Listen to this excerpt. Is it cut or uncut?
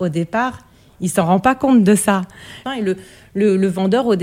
cut